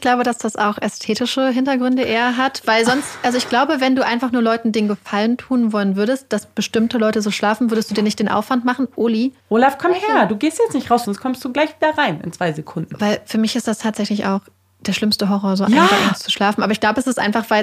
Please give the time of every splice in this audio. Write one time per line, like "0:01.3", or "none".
0:09.4
0:11.0